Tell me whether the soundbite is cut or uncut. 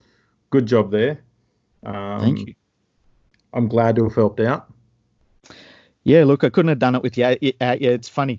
uncut